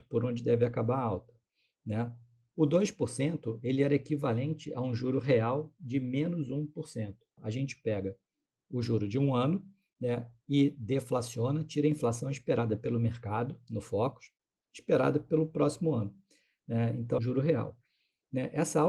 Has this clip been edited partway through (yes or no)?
yes